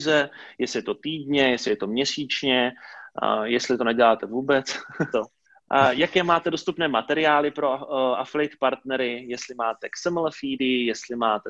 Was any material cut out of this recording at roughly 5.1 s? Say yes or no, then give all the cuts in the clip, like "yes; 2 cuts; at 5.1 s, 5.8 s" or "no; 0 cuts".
yes; 1 cut; at 5.1 s